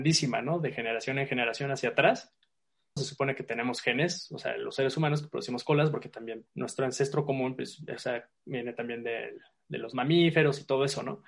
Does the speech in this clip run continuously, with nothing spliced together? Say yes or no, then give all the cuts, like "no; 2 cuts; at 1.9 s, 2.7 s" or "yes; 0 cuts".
no; 2 cuts; at 3.0 s, 6.5 s